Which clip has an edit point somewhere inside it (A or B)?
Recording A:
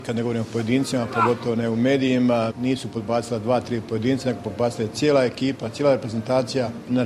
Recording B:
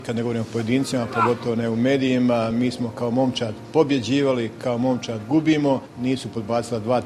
A